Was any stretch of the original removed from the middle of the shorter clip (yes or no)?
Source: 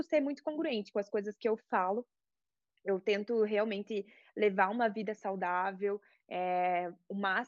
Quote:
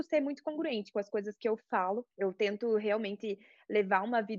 yes